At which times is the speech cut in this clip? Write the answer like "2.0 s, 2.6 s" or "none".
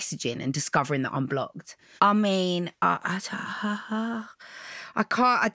2.0 s